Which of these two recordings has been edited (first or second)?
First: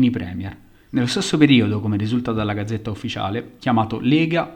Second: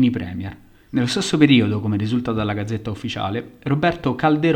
first